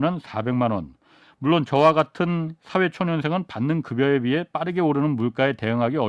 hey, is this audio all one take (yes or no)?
no